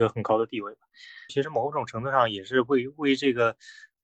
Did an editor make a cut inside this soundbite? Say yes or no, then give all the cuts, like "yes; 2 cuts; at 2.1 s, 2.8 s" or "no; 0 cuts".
yes; 1 cut; at 1.3 s